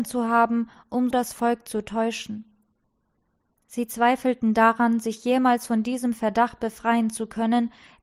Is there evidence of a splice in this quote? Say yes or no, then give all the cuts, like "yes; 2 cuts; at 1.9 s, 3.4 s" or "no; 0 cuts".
yes; 1 cut; at 1.1 s